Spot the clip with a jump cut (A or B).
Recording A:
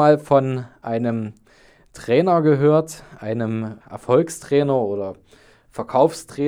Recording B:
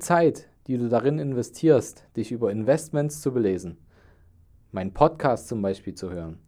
A